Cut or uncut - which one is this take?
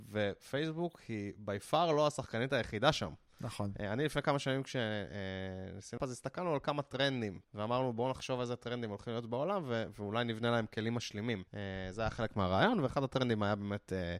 cut